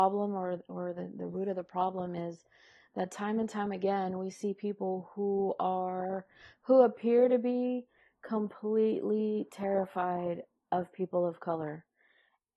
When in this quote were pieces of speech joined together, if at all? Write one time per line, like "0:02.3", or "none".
none

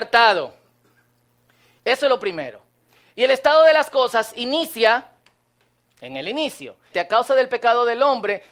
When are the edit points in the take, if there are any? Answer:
0:01.8
0:06.9

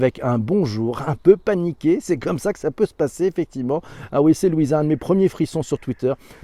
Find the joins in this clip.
none

